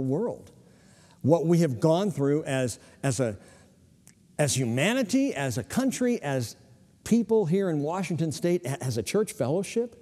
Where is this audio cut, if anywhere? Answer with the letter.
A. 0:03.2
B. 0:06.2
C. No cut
C